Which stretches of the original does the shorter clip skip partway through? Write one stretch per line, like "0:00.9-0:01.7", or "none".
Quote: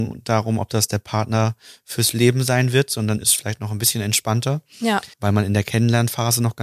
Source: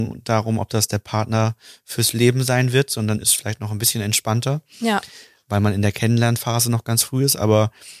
0:05.1-0:05.4